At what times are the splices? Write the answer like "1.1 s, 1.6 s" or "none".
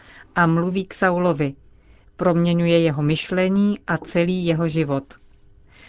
none

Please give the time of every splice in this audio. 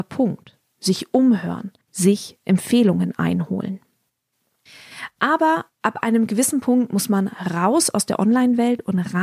1.8 s

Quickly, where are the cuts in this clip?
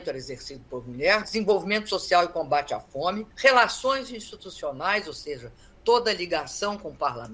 1.2 s, 3.3 s

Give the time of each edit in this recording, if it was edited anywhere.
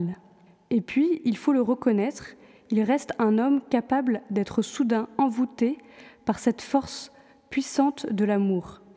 none

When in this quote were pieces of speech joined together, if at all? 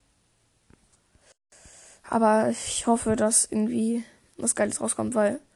none

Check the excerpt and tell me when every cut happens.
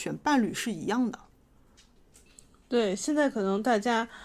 none

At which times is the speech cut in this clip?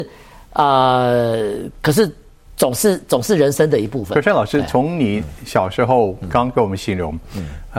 none

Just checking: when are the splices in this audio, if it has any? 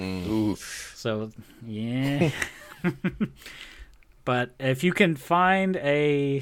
none

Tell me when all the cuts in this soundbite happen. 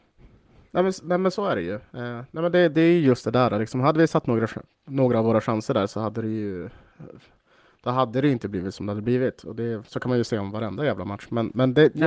none

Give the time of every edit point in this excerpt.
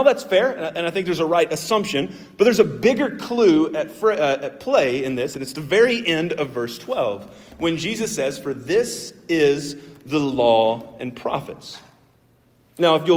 none

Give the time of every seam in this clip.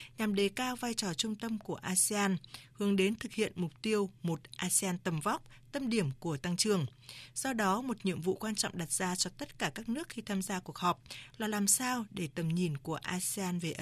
none

